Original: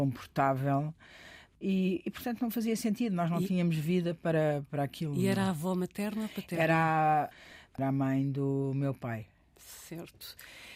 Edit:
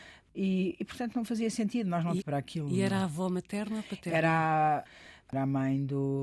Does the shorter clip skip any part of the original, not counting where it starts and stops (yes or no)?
yes